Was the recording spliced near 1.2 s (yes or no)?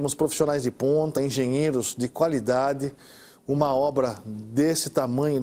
no